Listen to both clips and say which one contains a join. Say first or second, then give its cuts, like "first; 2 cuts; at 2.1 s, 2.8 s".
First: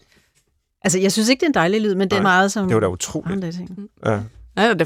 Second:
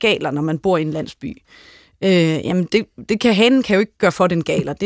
first; 1 cut; at 2.2 s